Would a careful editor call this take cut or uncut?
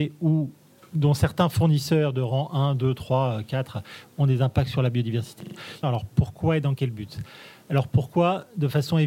cut